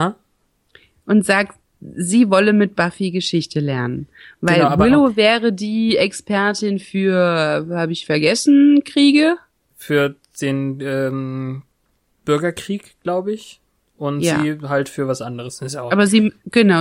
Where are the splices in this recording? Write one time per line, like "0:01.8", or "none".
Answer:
none